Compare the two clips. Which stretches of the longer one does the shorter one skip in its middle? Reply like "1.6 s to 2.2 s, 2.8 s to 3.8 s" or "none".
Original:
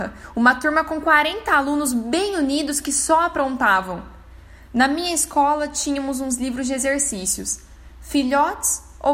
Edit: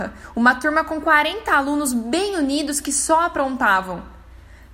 none